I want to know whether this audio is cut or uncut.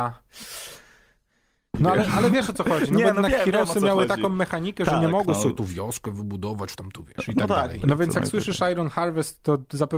cut